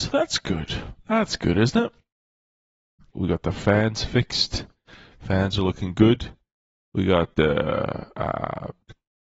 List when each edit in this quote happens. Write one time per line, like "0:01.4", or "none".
0:03.1